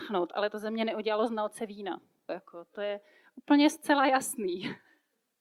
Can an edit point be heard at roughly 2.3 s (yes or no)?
yes